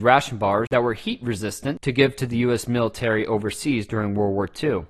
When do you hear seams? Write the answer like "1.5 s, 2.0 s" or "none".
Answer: none